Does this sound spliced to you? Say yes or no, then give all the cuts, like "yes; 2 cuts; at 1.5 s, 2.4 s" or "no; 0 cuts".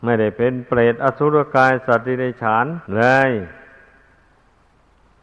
yes; 1 cut; at 2.9 s